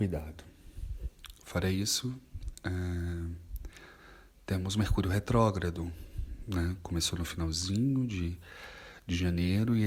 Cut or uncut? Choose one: uncut